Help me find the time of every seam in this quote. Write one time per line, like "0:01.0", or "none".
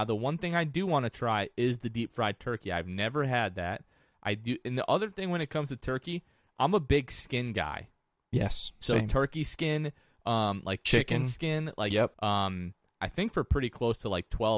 0:12.1

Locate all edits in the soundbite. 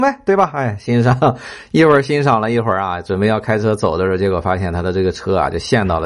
none

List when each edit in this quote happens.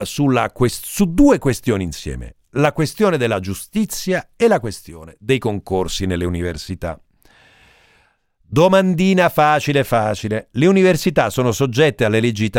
none

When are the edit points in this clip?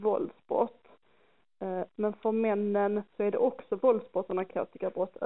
0:01.9
0:03.1

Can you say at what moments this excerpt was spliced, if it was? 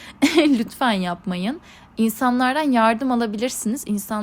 none

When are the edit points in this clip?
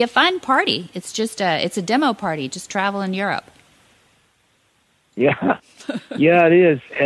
none

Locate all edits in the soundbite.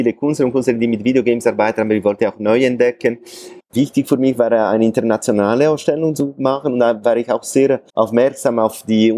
0:03.6
0:07.9

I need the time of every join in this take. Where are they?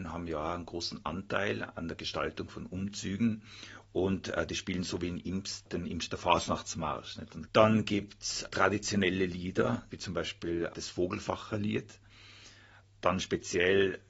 0:07.5
0:09.9

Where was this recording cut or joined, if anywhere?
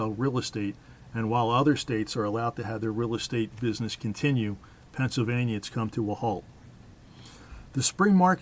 none

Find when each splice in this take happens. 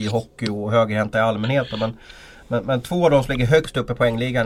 none

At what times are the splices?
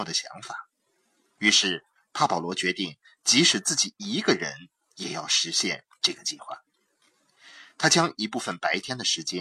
none

